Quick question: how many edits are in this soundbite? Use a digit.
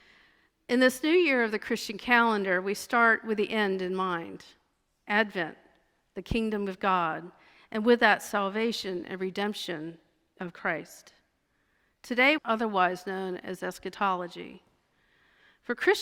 1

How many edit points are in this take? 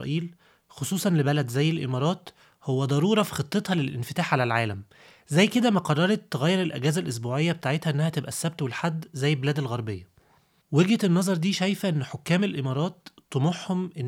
0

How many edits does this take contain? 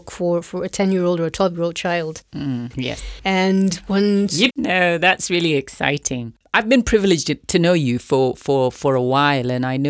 2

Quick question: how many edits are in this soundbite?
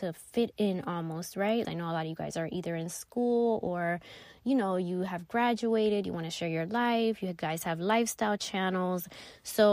1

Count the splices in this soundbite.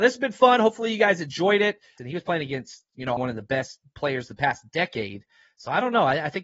2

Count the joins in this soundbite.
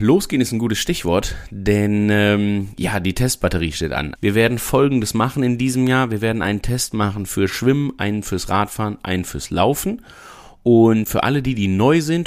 2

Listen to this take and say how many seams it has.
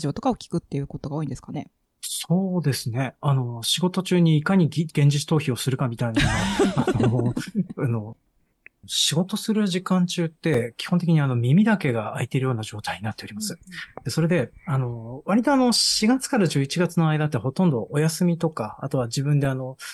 0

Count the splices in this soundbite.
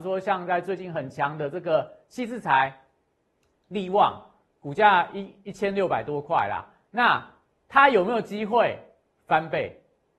0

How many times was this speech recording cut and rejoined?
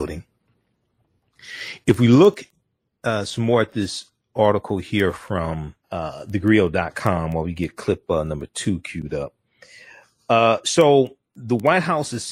1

